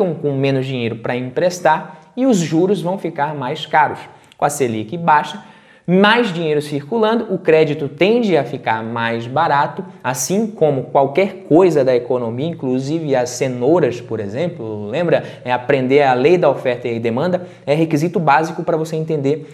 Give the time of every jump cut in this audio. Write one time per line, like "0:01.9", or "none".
none

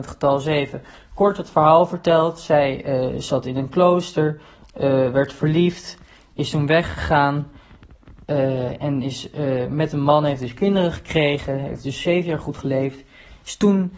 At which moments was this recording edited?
none

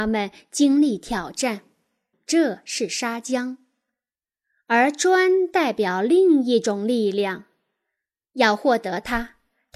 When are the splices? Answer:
0:02.1

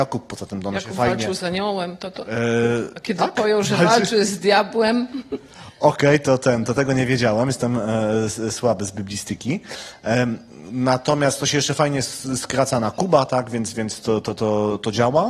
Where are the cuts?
none

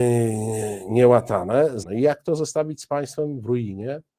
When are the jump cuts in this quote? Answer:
0:01.8

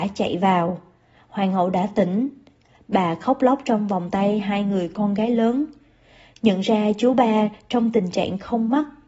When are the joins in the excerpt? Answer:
none

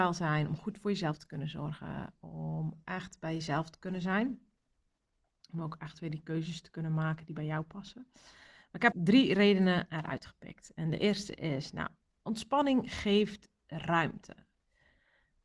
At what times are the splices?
0:08.9

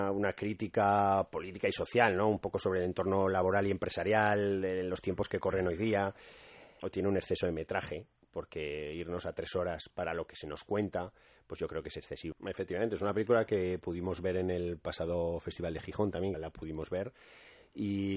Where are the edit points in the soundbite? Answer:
0:06.8
0:12.3
0:16.3

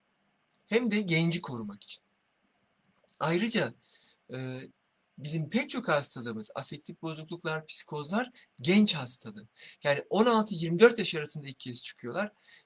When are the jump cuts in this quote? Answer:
none

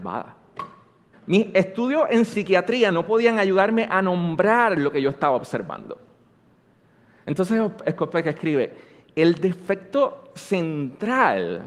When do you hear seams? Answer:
0:01.1

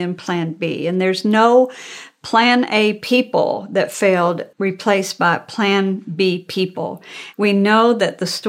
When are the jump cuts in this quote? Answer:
0:04.5
0:07.3

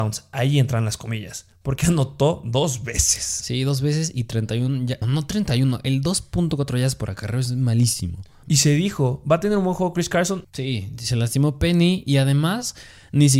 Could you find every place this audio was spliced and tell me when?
0:05.0
0:08.4
0:10.4

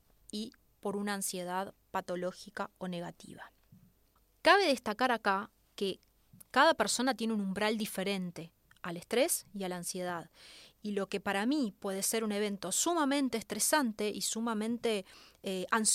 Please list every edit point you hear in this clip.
none

